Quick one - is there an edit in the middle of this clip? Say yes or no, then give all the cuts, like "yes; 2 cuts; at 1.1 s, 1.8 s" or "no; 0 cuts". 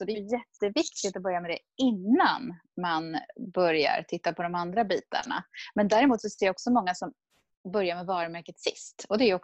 no; 0 cuts